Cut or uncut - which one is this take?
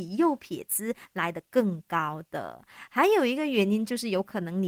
uncut